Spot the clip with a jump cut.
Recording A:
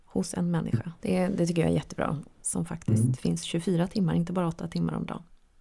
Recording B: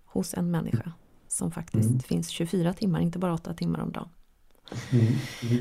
A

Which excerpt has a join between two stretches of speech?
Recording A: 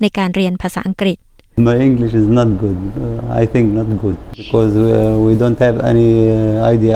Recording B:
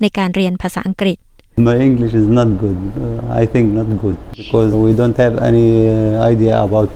B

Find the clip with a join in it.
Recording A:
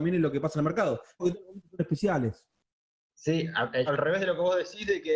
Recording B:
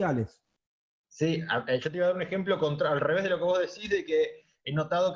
A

